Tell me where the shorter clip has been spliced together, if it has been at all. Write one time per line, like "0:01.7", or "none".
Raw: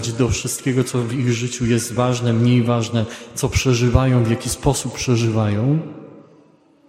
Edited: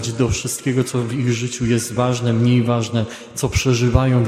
none